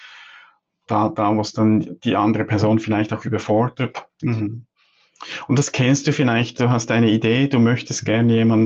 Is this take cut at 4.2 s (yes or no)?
yes